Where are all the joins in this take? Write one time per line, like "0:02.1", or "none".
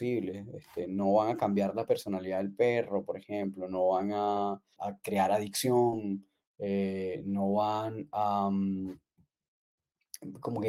0:04.8